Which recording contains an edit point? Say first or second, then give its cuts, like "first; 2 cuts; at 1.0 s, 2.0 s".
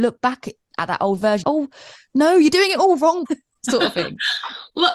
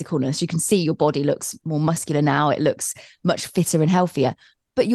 first; 2 cuts; at 1.4 s, 3.3 s